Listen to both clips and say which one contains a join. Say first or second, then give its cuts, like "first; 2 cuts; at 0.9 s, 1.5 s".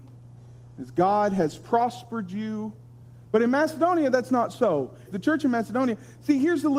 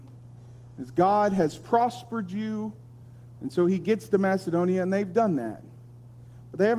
first; 2 cuts; at 3.2 s, 5.1 s